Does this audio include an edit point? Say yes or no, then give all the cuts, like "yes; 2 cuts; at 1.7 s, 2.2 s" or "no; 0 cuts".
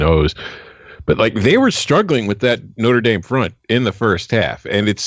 no; 0 cuts